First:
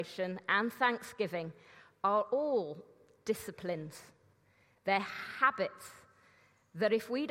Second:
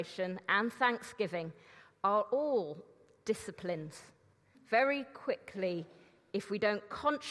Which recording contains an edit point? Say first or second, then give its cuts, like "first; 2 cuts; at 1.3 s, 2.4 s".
second; 1 cut; at 4.5 s